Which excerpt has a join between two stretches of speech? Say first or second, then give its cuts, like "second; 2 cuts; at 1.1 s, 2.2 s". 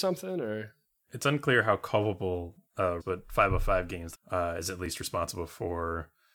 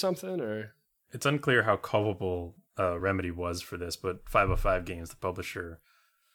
first; 2 cuts; at 3.0 s, 4.1 s